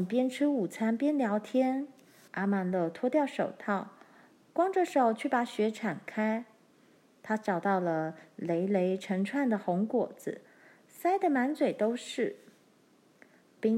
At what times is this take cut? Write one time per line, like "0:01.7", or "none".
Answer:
0:02.3

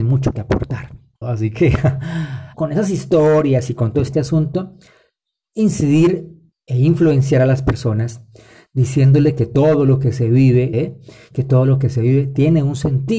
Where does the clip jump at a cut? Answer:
0:01.2
0:02.5
0:10.7

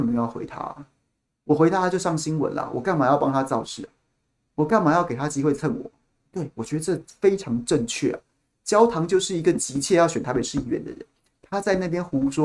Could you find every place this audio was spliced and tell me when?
none

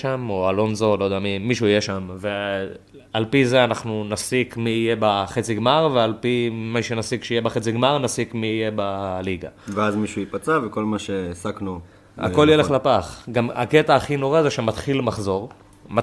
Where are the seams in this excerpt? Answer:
none

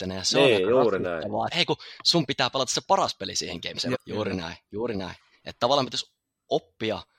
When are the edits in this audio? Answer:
0:01.5
0:03.9

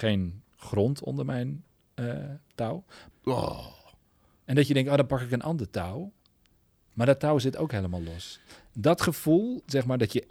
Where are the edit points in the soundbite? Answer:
0:03.1

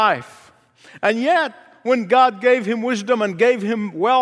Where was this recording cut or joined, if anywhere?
none

